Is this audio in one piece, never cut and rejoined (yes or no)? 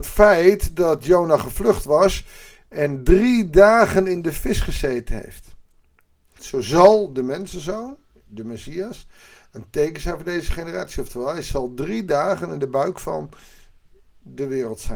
no